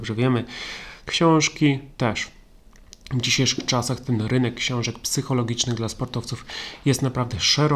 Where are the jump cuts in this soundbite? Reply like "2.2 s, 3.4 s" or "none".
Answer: 1.0 s